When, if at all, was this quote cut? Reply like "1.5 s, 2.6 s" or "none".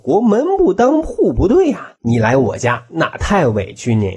2.0 s